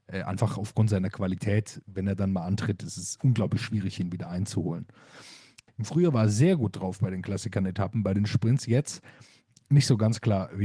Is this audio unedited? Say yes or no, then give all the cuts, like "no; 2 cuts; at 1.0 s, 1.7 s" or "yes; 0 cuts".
no; 1 cut; at 5.7 s